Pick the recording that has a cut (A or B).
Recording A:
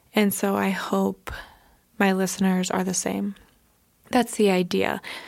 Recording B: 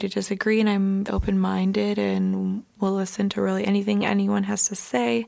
B